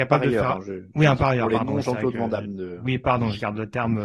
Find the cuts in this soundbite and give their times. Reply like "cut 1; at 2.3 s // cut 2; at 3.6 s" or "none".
none